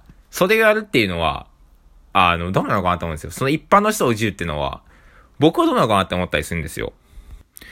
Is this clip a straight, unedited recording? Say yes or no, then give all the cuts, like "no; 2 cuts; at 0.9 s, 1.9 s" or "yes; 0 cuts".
yes; 0 cuts